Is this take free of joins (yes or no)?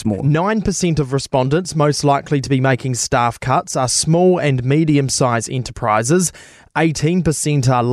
yes